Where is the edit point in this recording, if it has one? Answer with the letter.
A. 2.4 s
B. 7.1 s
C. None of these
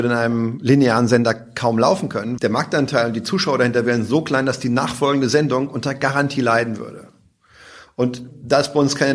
A